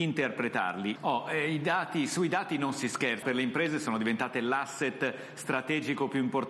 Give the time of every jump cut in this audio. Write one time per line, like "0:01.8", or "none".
0:01.0
0:03.2